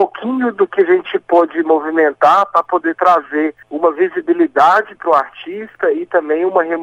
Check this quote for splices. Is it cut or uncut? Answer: cut